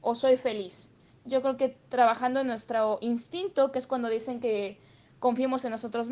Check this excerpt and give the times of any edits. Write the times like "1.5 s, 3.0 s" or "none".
1.1 s